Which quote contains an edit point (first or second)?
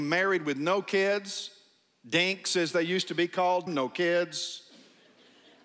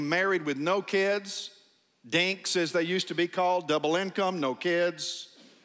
first